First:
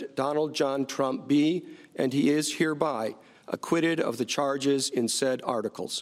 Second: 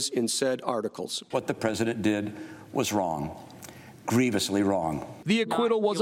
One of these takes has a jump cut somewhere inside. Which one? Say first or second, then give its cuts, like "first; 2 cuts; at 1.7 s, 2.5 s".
second; 1 cut; at 1.3 s